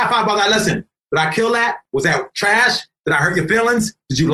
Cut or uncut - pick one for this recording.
uncut